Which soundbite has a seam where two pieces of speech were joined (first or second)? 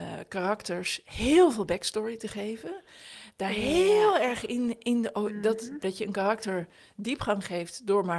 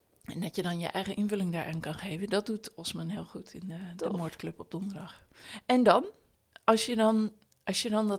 first